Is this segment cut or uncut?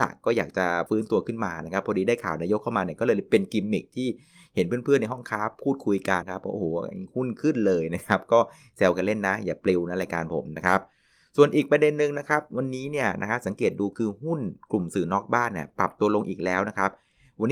cut